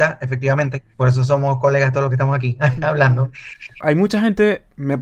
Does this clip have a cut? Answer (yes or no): yes